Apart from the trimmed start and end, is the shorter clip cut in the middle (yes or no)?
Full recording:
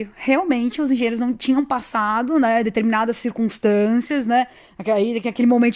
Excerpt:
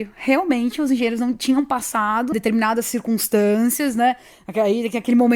yes